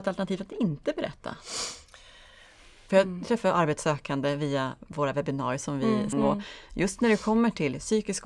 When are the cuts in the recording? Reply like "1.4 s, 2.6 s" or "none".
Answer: 2.9 s, 6.1 s